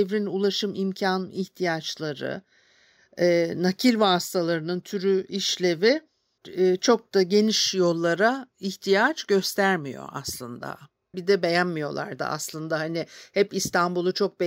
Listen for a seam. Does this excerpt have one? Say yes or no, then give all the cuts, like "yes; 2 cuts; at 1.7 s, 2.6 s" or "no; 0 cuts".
yes; 2 cuts; at 6.4 s, 11.1 s